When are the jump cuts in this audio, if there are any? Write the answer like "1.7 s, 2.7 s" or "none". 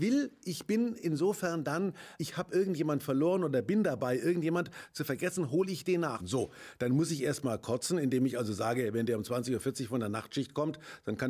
2.2 s, 6.2 s